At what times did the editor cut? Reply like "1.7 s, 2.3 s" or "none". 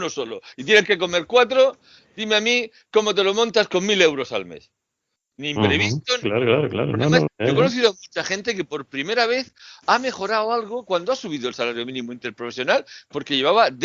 6.2 s, 7.3 s